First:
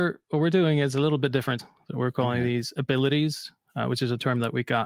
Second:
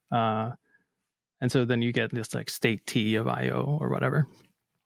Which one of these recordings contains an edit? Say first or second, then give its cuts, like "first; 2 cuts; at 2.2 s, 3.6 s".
first; 1 cut; at 1.6 s